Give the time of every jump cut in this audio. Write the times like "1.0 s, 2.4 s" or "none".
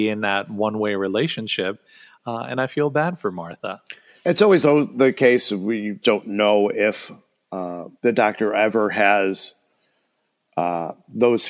6.0 s, 8.0 s